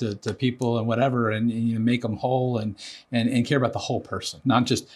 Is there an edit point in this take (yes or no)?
no